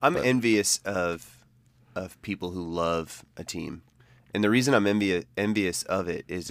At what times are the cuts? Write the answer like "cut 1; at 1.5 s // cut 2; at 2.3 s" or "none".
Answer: none